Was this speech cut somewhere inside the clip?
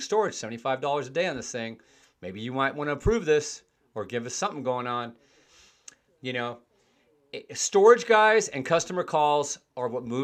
no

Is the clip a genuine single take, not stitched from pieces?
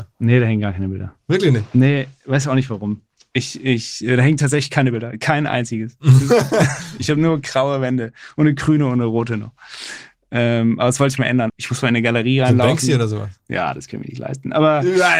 no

